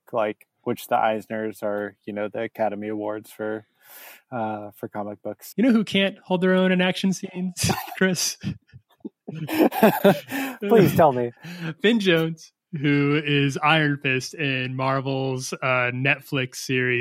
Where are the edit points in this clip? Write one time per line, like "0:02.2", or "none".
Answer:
0:05.5